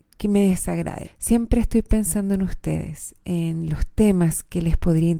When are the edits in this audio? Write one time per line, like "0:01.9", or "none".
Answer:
0:01.0